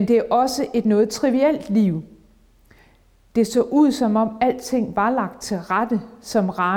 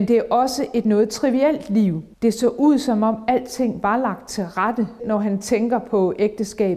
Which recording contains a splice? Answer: second; 2 cuts; at 2.1 s, 5.0 s

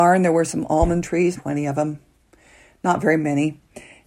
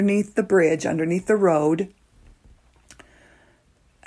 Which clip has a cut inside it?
first; 1 cut; at 1.3 s

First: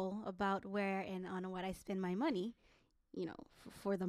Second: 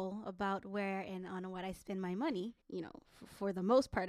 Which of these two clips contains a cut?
second; 1 cut; at 2.6 s

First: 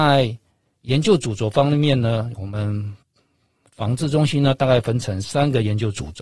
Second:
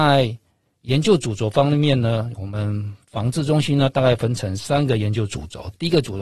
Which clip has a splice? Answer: second; 1 cut; at 3.0 s

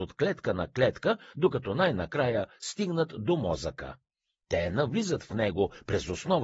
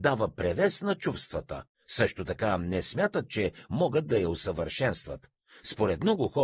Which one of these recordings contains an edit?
second; 1 cut; at 1.7 s

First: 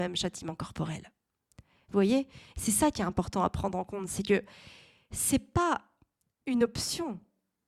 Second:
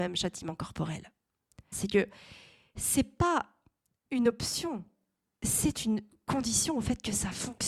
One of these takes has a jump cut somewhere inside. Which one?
second; 1 cut; at 1.7 s

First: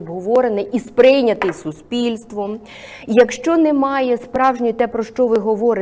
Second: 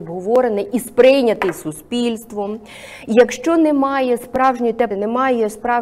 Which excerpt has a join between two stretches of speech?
second; 1 cut; at 4.9 s

